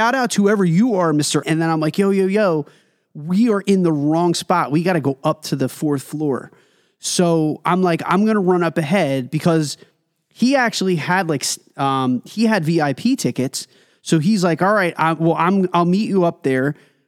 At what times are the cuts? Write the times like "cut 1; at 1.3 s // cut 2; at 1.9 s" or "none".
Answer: cut 1; at 1.4 s